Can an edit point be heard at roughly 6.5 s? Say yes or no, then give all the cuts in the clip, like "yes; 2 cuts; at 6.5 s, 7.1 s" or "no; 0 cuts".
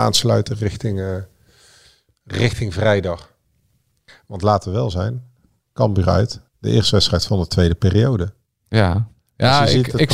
yes; 1 cut; at 6.5 s